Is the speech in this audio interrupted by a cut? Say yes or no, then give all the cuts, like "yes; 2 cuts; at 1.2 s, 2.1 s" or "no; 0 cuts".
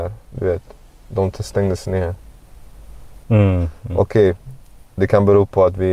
yes; 1 cut; at 3.2 s